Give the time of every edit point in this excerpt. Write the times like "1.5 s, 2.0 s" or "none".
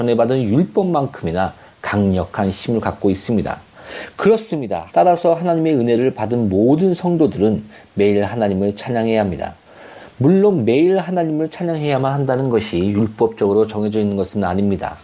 4.9 s